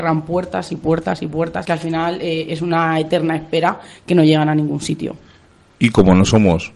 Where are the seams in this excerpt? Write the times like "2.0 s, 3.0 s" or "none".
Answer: 1.6 s